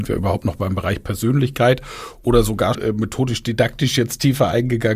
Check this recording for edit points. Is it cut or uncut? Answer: cut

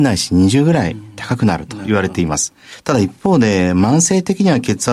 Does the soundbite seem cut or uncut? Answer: uncut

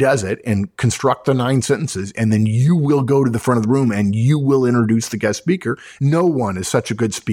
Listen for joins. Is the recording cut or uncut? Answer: cut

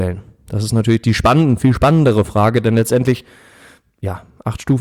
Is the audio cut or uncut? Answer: uncut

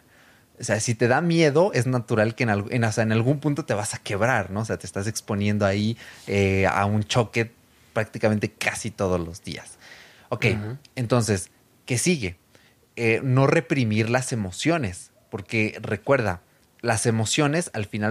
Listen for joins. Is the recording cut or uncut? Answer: uncut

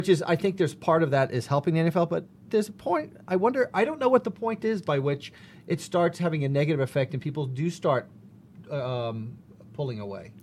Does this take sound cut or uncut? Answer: uncut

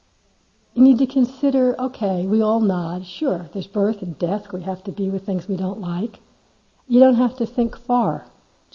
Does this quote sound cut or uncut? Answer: cut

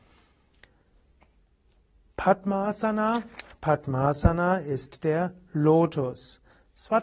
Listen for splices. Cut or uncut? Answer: uncut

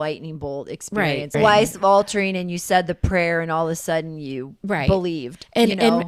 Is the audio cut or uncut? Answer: cut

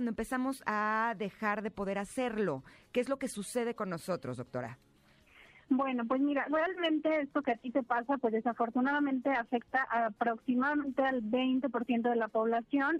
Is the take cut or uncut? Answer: uncut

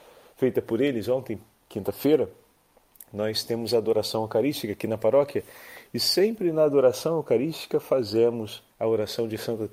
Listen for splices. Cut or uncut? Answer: cut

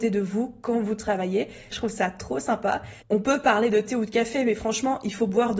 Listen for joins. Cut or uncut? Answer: cut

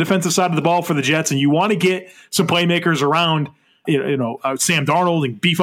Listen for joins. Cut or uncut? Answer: cut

